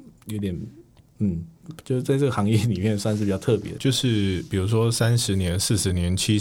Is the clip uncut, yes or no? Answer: no